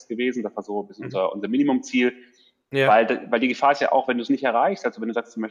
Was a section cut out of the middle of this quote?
no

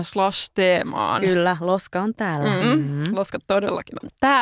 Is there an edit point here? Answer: yes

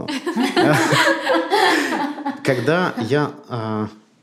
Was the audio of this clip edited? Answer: no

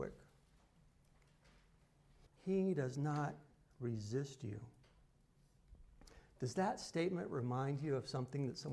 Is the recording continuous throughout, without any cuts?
no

